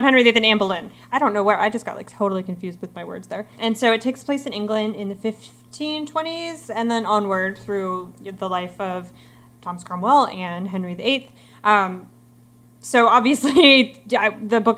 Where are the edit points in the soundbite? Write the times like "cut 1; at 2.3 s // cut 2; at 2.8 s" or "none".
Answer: cut 1; at 3.5 s